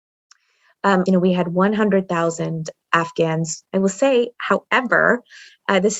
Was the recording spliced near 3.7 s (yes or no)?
yes